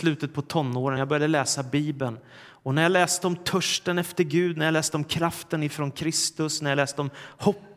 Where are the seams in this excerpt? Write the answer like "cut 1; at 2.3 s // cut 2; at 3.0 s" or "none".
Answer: none